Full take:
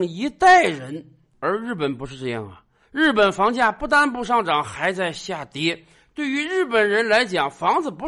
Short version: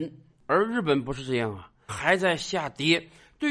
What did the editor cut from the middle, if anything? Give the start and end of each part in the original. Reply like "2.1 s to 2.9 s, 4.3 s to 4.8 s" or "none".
2.8 s to 4.6 s